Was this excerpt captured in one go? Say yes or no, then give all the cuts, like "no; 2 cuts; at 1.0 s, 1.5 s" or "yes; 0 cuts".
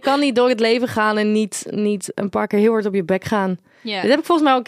yes; 0 cuts